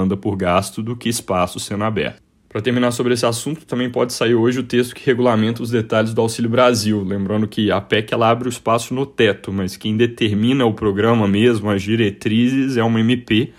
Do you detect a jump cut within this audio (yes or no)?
no